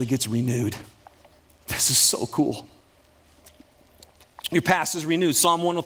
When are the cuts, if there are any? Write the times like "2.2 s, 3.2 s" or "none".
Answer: none